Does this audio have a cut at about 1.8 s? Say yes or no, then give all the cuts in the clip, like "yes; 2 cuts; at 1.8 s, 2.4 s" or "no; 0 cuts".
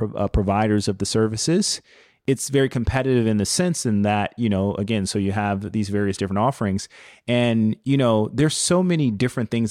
no; 0 cuts